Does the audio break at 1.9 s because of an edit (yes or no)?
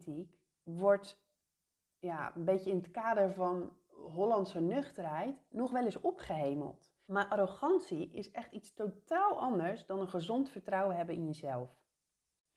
no